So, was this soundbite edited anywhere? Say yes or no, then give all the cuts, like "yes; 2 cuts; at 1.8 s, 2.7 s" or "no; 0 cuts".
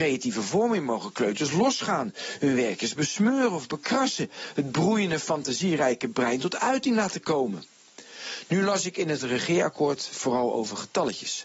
no; 0 cuts